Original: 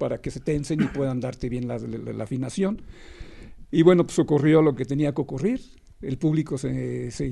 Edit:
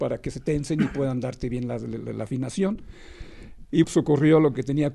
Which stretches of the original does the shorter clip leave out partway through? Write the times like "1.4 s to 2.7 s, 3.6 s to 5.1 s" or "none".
3.8 s to 4.1 s